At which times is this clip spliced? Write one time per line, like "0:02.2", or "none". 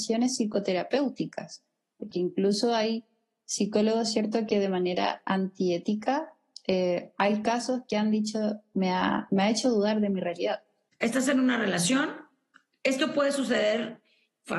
0:02.1
0:10.9